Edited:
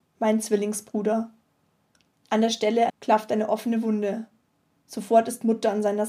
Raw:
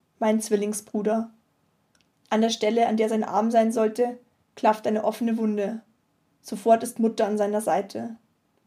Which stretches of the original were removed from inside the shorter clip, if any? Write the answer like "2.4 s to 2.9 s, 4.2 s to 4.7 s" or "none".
2.9 s to 4.4 s

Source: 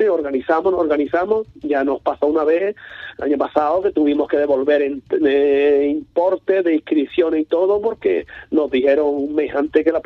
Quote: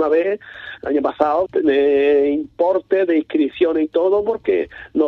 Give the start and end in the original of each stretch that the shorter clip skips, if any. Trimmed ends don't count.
3.8 s to 5.0 s

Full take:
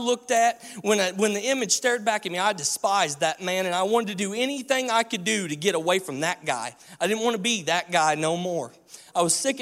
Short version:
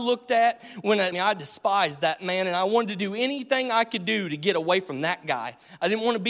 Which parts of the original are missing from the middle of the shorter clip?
1.1 s to 2.3 s

